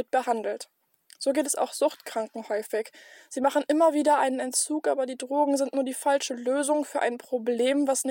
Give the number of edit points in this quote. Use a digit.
0